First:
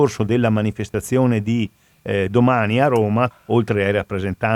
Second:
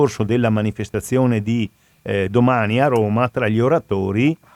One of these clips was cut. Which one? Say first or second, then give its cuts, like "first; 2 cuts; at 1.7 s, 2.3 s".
first; 1 cut; at 3.3 s